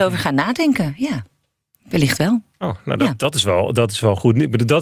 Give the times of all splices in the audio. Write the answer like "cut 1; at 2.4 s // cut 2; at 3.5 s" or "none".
none